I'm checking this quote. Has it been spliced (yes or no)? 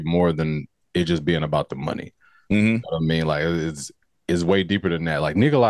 no